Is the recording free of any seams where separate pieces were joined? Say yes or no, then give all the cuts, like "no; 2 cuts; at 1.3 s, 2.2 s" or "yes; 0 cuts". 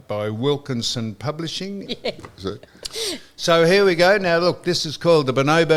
no; 1 cut; at 1.9 s